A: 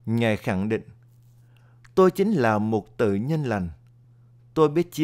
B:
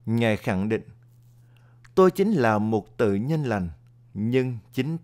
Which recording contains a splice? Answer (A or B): B